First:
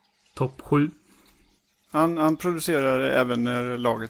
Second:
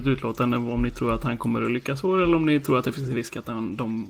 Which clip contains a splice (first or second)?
first